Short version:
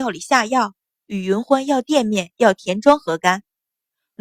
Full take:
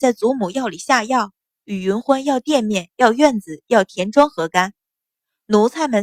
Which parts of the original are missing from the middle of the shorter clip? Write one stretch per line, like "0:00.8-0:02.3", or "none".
0:02.9-0:03.6